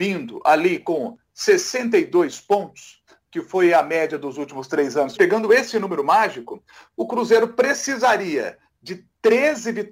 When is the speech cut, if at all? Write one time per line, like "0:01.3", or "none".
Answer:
0:05.2